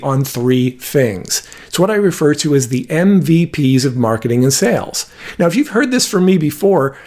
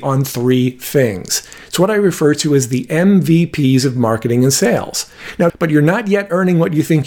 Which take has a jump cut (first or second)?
second